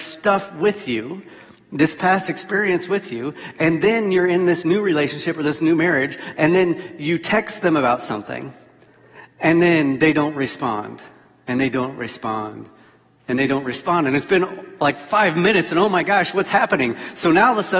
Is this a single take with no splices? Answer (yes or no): yes